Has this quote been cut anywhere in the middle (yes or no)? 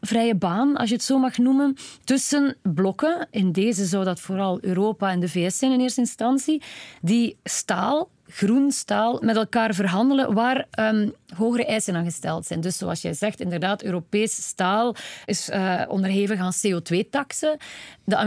no